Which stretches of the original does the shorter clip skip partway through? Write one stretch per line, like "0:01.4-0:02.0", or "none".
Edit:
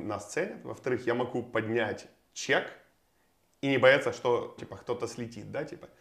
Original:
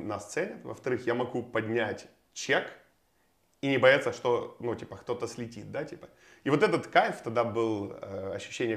0:04.6-0:04.8